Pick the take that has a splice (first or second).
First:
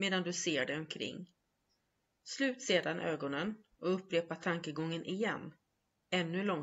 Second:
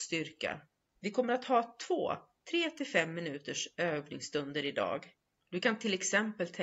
second